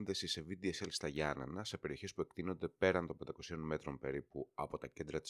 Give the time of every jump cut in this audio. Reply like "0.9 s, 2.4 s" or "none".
none